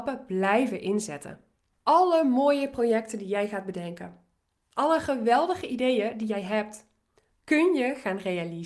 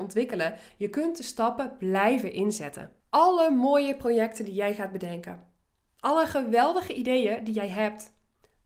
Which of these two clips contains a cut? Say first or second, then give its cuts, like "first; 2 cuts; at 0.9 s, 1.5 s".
second; 1 cut; at 3.0 s